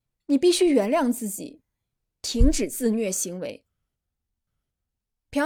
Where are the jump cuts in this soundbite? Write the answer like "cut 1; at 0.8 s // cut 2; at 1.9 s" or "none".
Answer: none